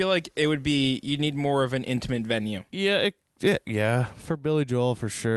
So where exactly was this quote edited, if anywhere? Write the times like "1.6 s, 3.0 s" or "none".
none